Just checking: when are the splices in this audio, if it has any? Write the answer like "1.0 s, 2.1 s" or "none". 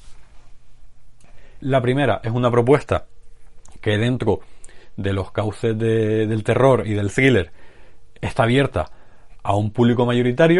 1.6 s, 8.2 s